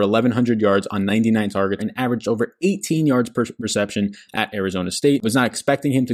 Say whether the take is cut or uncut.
cut